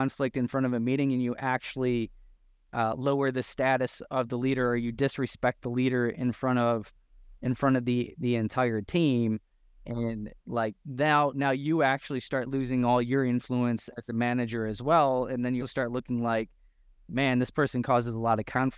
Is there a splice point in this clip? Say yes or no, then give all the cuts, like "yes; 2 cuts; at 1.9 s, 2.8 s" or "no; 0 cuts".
yes; 2 cuts; at 13.9 s, 15.6 s